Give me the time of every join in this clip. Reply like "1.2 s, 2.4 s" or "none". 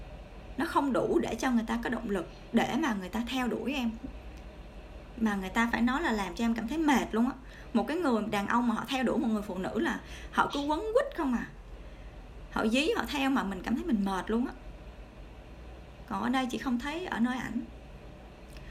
5.7 s